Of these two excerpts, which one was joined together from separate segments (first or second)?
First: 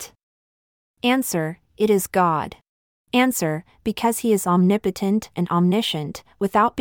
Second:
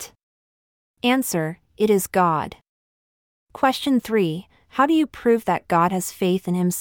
first